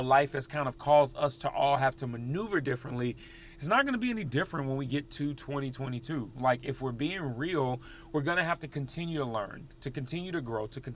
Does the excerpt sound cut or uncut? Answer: uncut